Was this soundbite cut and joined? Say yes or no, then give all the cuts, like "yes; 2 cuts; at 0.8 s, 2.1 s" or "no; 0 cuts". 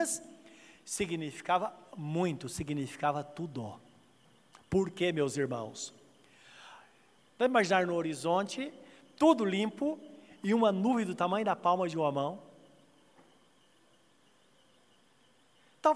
yes; 1 cut; at 7.2 s